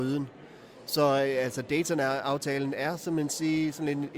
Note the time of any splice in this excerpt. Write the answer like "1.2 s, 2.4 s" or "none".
none